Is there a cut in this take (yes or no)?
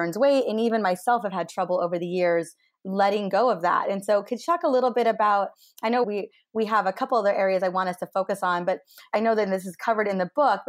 yes